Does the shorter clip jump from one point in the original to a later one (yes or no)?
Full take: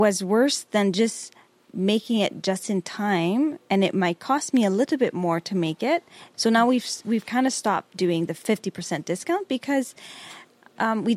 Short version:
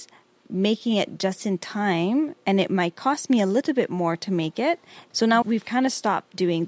yes